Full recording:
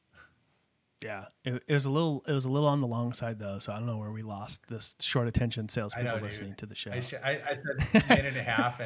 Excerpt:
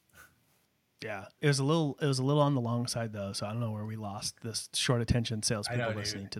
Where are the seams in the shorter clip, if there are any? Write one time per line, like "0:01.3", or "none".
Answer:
0:01.4